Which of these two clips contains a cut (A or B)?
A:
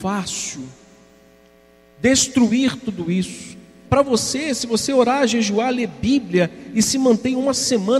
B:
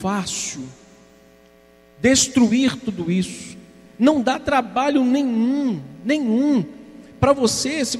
A